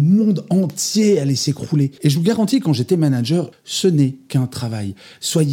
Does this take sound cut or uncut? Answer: cut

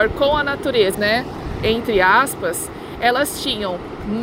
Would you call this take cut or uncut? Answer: cut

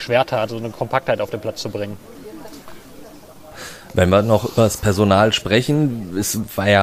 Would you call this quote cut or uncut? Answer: uncut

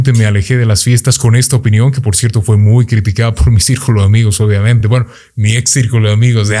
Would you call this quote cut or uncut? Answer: uncut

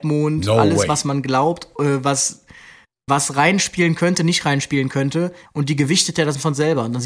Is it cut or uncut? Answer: cut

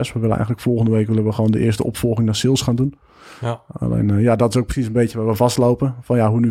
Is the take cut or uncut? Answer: uncut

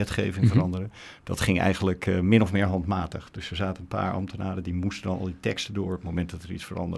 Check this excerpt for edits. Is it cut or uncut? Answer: uncut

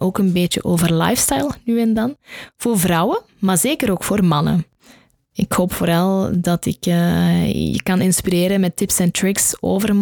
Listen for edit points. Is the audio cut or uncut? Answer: uncut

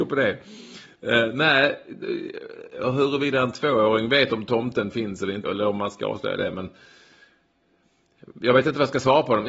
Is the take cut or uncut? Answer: cut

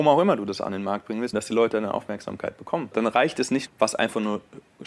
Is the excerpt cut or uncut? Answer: cut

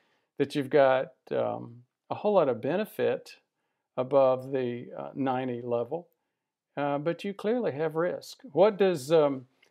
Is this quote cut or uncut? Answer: uncut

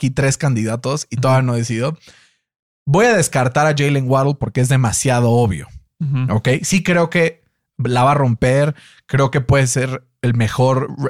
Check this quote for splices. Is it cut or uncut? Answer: uncut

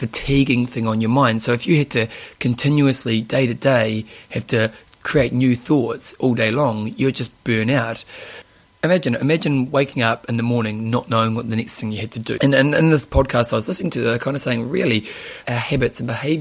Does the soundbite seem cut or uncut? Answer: cut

